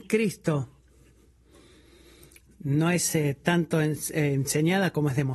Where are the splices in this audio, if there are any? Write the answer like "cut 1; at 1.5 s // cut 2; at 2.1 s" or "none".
none